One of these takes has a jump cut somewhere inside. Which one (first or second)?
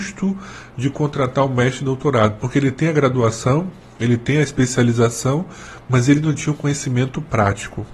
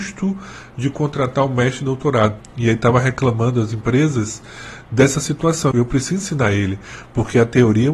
second